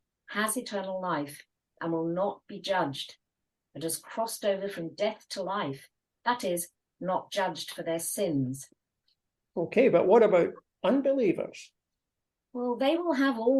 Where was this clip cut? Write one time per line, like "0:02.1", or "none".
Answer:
none